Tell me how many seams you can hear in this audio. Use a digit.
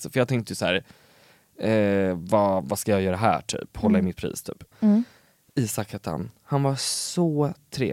1